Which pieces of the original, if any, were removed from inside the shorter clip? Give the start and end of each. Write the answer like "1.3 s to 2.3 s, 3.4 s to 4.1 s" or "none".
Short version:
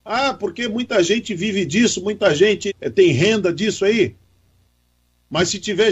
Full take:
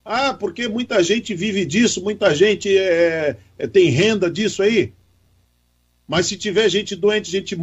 2.7 s to 3.5 s